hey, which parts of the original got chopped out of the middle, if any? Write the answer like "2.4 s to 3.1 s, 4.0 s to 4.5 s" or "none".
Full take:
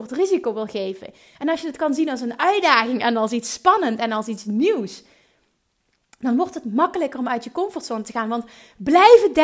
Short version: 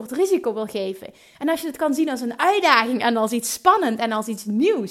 none